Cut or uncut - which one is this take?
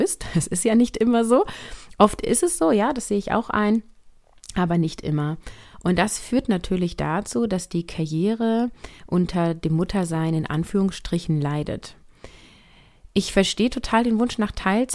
uncut